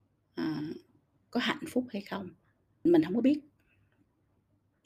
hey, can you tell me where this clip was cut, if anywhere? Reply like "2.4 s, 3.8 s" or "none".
2.9 s